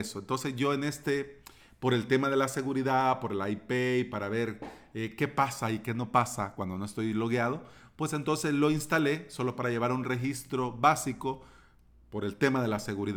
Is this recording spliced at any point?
no; 0 cuts

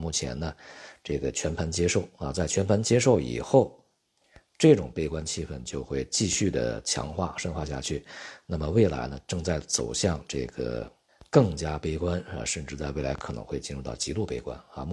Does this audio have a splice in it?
no; 0 cuts

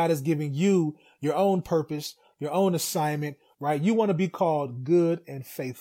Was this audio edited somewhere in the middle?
yes; 1 cut; at 3.5 s

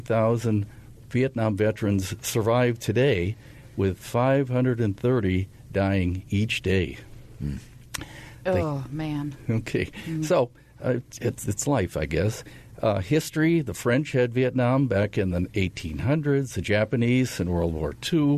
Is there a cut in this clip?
no; 0 cuts

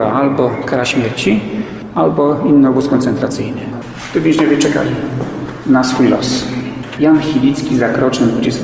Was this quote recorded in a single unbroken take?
no; 1 cut; at 7.0 s

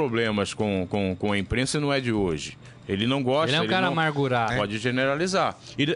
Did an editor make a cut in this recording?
yes; 1 cut; at 4.5 s

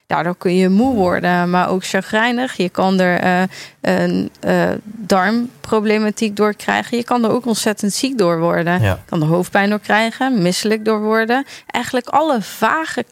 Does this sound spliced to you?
no; 0 cuts

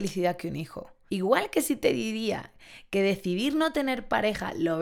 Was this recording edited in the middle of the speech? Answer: yes; 1 cut; at 1.1 s

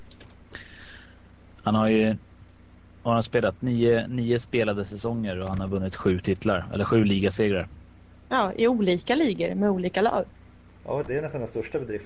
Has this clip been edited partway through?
yes; 2 cuts; at 8.3 s, 11.0 s

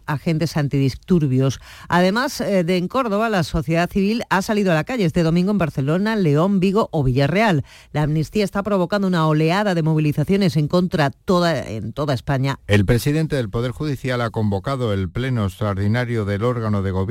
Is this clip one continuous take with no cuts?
no; 1 cut; at 12.6 s

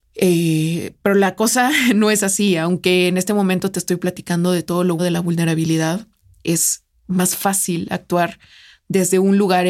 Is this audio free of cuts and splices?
no; 1 cut; at 5.0 s

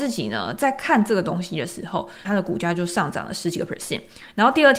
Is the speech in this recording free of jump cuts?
no; 1 cut; at 2.2 s

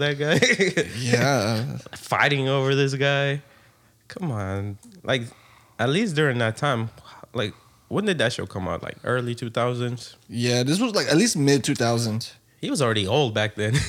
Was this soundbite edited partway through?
no; 0 cuts

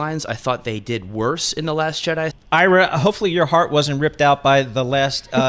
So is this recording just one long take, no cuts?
no; 1 cut; at 2.3 s

